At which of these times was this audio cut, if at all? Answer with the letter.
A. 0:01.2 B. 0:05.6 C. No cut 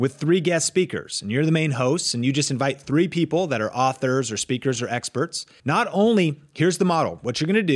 B